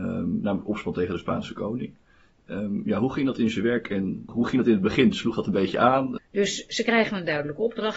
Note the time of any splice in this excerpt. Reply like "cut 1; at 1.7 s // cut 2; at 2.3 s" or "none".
cut 1; at 4.3 s // cut 2; at 6.2 s